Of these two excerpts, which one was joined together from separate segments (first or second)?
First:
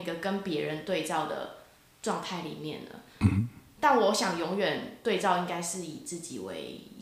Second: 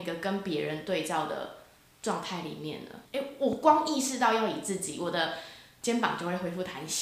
second